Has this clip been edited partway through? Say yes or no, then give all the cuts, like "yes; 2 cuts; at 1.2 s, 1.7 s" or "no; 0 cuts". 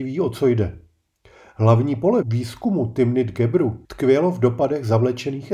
yes; 2 cuts; at 2.2 s, 3.8 s